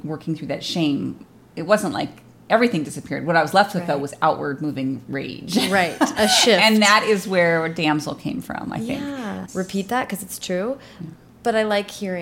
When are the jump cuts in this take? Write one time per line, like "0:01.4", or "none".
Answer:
0:09.5